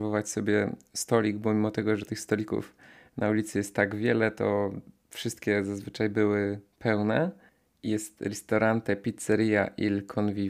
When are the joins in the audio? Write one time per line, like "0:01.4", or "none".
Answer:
none